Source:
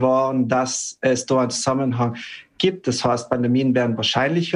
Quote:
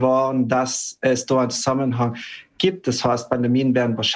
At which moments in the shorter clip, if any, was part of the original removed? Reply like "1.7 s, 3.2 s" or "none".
none